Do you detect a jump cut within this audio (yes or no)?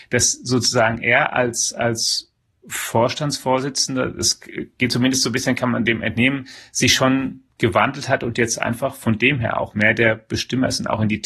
no